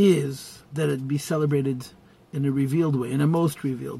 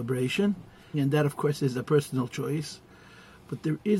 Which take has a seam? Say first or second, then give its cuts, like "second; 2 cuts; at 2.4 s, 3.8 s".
second; 1 cut; at 0.9 s